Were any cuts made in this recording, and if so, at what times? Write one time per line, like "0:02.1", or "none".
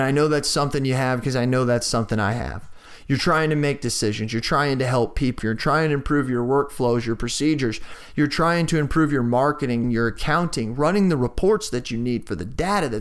0:05.4
0:09.8